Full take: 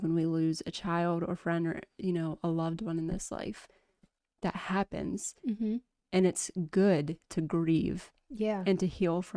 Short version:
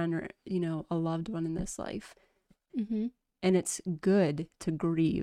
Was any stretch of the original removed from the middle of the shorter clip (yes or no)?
yes